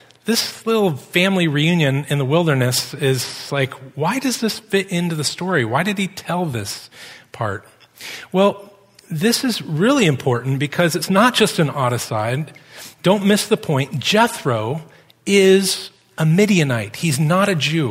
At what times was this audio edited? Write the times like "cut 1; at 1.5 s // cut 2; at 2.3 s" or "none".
none